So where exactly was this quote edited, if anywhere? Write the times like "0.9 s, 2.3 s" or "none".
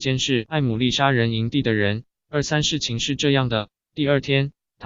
none